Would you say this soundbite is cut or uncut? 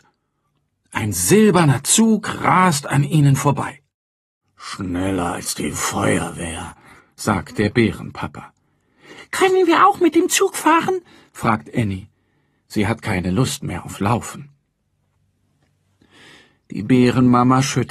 uncut